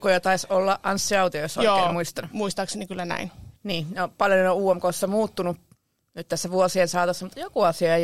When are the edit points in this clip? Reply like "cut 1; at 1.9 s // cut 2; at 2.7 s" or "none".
cut 1; at 3.6 s